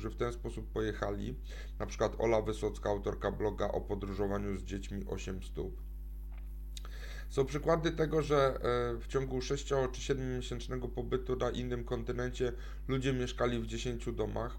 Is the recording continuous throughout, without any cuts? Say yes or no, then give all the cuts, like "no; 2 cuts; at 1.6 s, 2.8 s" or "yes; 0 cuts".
yes; 0 cuts